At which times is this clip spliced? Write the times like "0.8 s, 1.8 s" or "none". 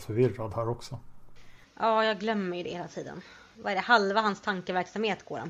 none